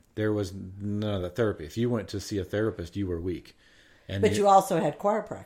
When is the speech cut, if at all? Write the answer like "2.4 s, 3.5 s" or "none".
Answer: none